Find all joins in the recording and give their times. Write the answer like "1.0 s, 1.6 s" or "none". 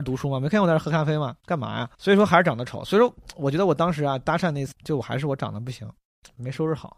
1.9 s, 4.7 s